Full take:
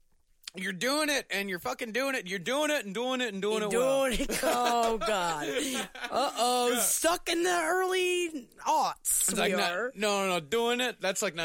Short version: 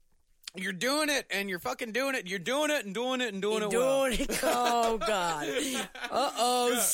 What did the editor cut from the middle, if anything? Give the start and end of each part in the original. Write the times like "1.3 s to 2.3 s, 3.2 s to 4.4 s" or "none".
none